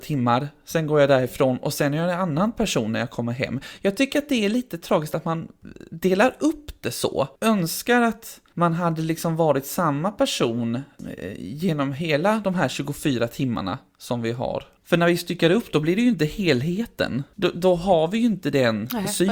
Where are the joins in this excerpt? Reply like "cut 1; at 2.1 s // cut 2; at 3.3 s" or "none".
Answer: cut 1; at 7.3 s